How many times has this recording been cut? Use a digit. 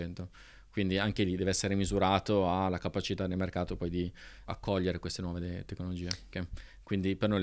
2